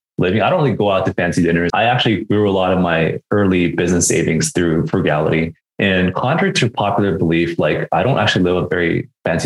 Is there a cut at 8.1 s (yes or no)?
no